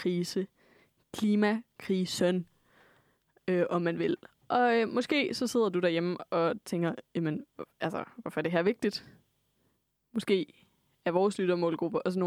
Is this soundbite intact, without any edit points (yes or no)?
yes